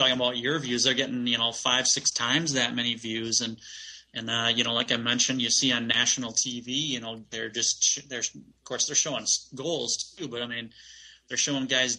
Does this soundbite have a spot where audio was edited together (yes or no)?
no